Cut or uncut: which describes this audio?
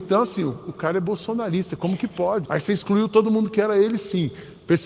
cut